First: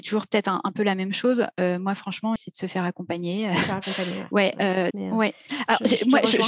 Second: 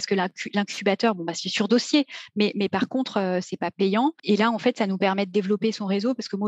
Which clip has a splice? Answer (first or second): first